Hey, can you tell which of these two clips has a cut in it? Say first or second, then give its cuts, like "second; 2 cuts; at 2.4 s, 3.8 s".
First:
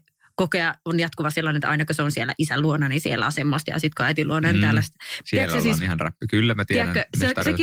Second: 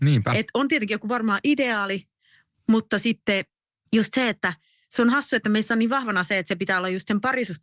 first; 1 cut; at 5.2 s